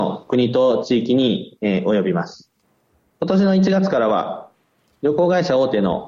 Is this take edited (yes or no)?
no